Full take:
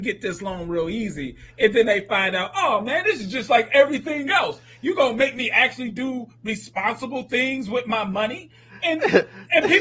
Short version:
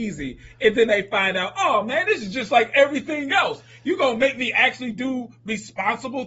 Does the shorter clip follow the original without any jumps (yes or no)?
yes